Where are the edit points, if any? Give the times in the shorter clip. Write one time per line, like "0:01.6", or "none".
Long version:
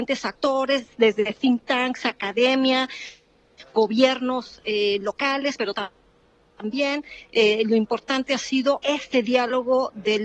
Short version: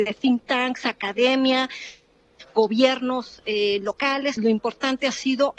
0:04.4